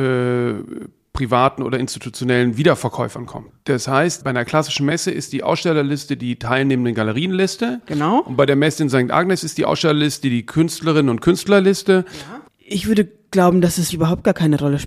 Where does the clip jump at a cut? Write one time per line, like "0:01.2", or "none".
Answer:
0:03.5
0:12.5
0:13.9